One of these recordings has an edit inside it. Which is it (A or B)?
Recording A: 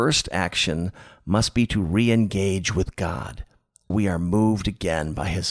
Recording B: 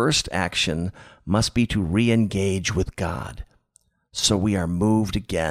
A